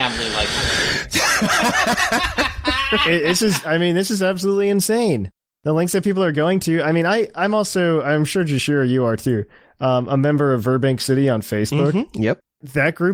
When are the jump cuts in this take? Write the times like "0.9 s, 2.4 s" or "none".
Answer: none